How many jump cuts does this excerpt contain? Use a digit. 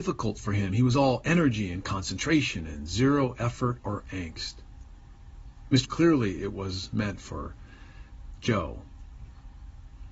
1